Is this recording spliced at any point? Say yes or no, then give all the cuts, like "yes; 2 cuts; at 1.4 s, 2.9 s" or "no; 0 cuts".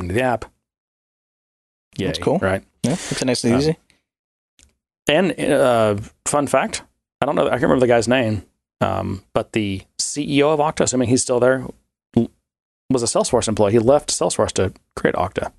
no; 0 cuts